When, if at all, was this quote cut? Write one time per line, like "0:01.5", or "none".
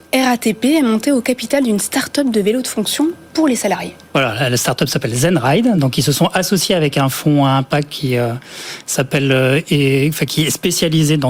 none